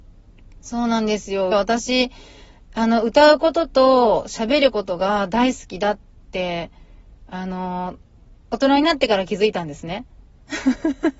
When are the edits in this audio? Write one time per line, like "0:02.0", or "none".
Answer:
0:01.5

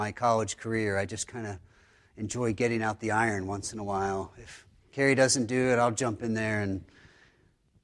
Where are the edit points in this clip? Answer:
none

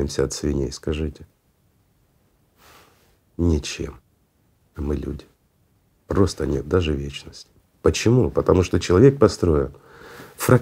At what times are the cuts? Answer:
0:05.9
0:07.7

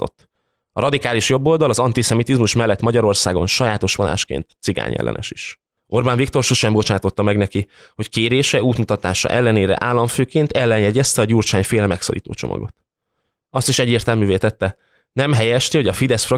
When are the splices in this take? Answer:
0:05.8

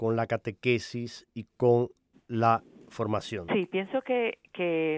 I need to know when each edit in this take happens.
0:03.5

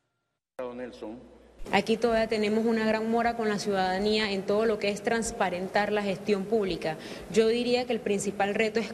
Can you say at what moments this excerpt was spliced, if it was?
0:01.6

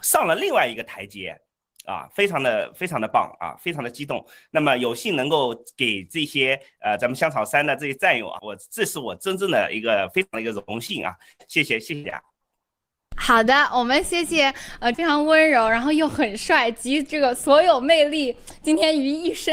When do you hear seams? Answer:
0:08.4
0:14.9

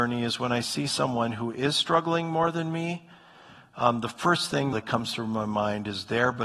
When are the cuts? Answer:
0:04.7

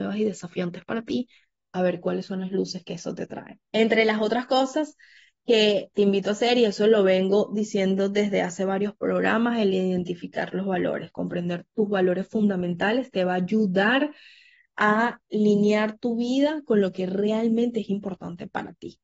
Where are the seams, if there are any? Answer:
0:03.6

